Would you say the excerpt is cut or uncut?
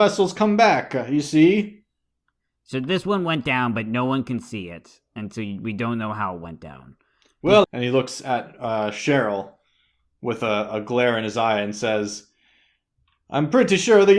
cut